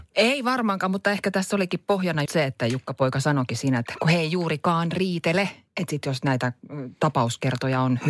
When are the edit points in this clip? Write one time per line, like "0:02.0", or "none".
0:02.3